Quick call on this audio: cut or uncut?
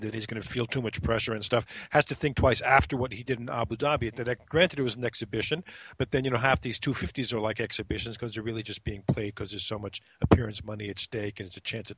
uncut